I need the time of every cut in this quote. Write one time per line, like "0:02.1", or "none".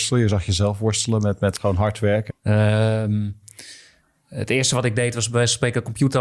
0:02.3